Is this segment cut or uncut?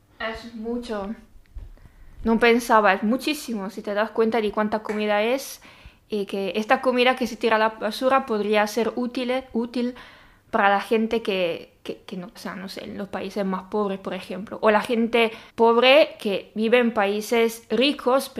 cut